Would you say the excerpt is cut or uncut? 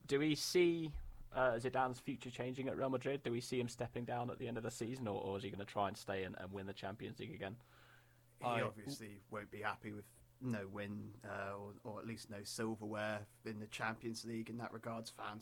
uncut